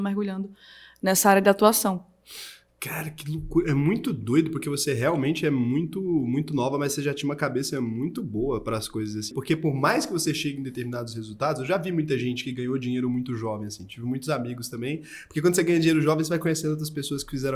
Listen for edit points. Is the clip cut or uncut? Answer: cut